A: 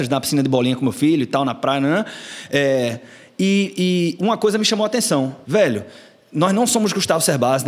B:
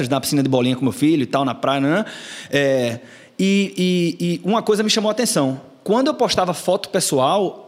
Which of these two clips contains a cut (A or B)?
A